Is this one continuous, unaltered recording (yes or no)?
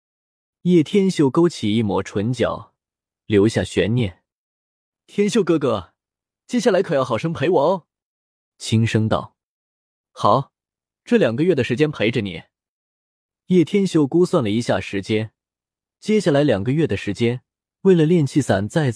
no